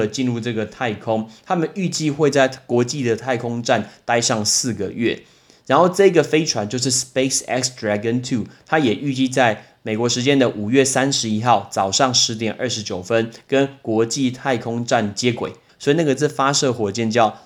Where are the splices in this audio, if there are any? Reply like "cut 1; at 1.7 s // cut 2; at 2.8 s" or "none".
cut 1; at 15.7 s